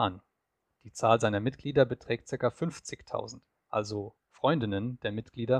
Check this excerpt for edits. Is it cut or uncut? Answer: cut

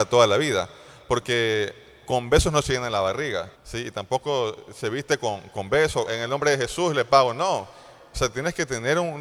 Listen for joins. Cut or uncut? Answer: cut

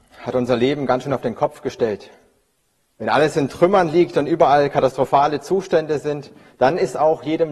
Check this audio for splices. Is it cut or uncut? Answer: cut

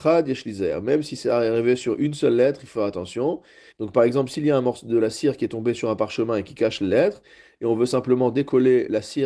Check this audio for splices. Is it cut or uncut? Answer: cut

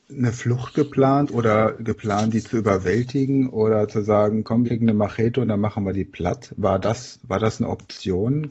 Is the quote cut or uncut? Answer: cut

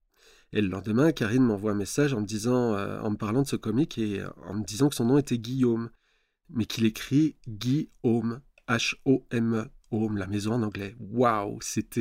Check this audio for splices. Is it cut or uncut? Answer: uncut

